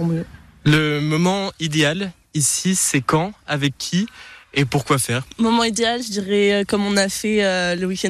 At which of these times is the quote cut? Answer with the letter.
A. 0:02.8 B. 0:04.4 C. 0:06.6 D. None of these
B